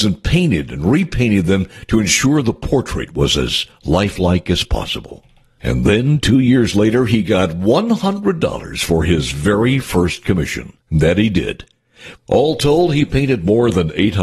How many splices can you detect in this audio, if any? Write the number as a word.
two